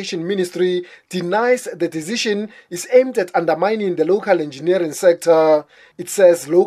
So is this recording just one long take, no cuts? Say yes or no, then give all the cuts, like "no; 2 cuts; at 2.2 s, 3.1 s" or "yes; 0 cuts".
yes; 0 cuts